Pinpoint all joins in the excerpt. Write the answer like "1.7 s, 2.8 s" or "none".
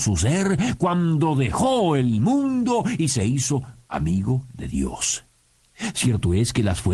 none